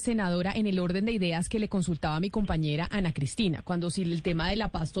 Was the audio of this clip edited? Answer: no; 0 cuts

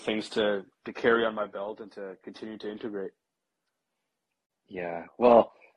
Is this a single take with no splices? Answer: yes; 0 cuts

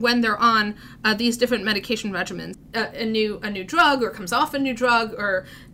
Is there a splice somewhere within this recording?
yes; 1 cut; at 2.5 s

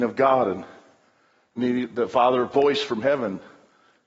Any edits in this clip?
no; 0 cuts

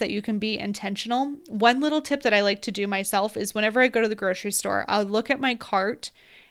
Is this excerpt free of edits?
yes; 0 cuts

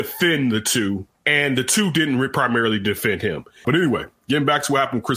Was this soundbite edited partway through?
yes; 2 cuts; at 1.1 s, 3.6 s

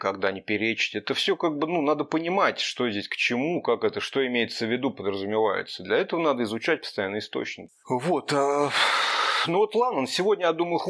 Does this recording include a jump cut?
no; 0 cuts

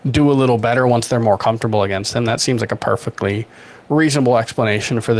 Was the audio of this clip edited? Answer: no; 0 cuts

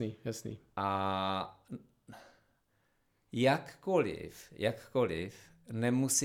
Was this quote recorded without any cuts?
yes; 0 cuts

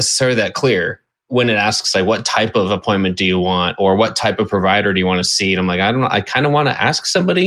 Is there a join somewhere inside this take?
no; 0 cuts

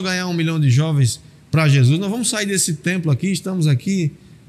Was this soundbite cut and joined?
no; 0 cuts

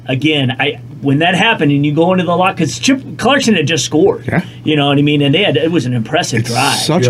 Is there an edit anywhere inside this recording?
no; 0 cuts

